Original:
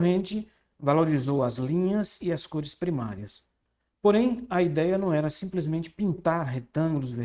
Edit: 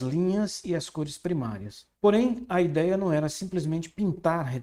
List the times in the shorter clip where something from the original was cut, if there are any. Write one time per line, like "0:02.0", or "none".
0:01.9